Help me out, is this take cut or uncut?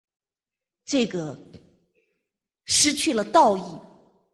uncut